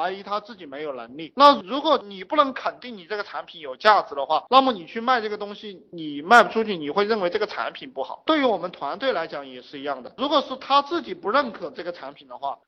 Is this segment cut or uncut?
uncut